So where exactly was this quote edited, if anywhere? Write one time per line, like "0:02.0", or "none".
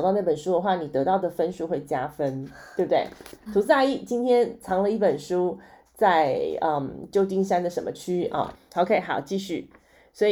0:03.5
0:08.5